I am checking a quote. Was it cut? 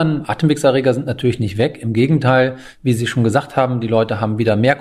no; 0 cuts

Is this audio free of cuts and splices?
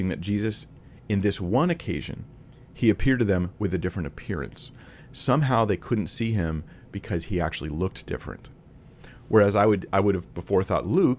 yes; 0 cuts

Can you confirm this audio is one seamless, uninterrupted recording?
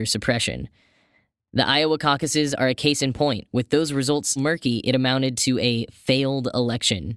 no; 1 cut; at 4.4 s

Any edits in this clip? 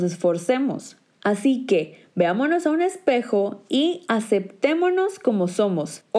no; 0 cuts

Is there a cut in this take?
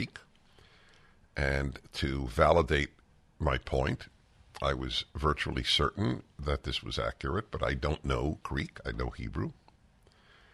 no; 0 cuts

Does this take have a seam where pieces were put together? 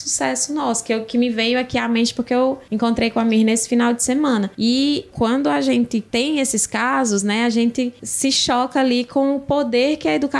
no; 0 cuts

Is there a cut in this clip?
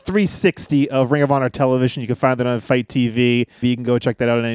yes; 1 cut; at 3.6 s

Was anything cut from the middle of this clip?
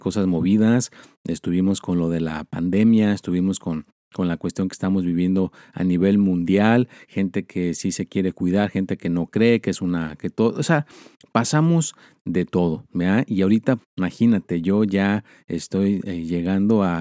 yes; 1 cut; at 13.8 s

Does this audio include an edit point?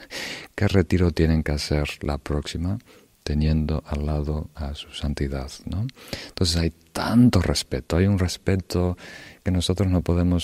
no; 0 cuts

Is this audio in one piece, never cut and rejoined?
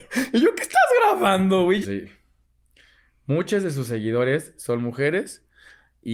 no; 1 cut; at 1.8 s

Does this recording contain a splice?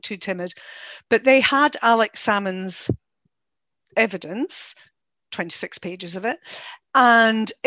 no; 0 cuts

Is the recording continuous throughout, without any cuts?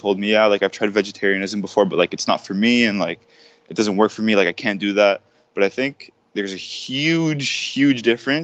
yes; 0 cuts

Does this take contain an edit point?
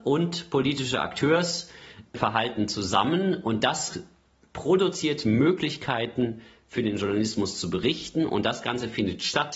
no; 0 cuts

